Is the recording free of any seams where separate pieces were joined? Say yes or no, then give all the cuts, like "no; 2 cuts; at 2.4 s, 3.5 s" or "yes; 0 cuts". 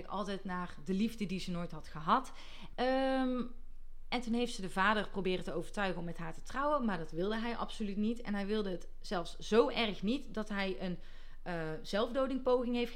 no; 1 cut; at 2.7 s